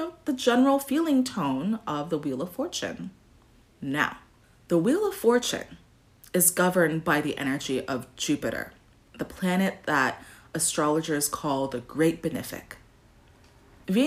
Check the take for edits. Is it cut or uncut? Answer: uncut